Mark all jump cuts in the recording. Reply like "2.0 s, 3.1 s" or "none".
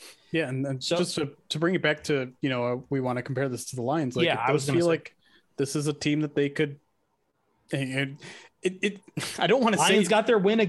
none